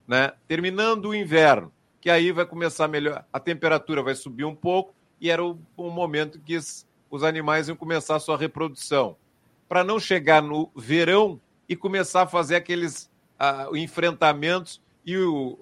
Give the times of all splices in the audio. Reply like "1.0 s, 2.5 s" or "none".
none